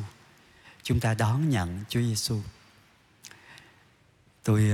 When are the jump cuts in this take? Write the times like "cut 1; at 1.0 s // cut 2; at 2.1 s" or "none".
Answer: none